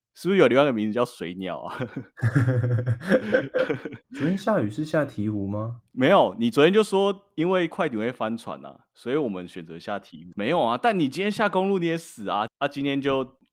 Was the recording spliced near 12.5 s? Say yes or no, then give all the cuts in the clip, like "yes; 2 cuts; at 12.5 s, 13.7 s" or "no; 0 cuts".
yes; 2 cuts; at 10.3 s, 12.5 s